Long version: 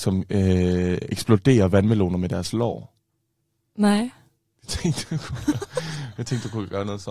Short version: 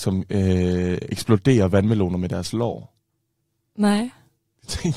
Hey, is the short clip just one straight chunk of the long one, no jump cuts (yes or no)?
yes